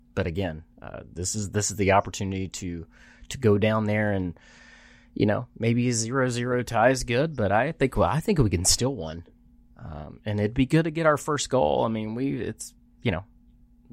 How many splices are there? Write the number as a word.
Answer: zero